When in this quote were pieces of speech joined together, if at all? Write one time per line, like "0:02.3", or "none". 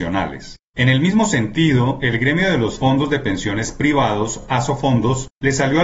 none